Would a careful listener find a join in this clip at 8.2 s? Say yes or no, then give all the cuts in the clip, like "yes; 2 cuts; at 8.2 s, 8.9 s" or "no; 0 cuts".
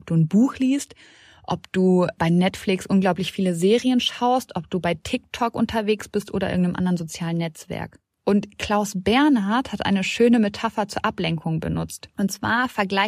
no; 0 cuts